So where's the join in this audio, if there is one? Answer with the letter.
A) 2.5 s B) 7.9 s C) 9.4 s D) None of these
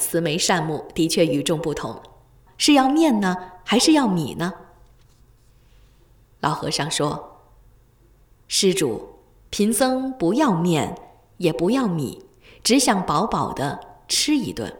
A